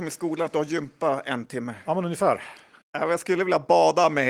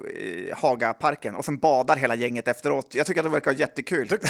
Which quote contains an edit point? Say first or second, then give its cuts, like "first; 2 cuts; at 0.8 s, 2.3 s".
first; 1 cut; at 2.8 s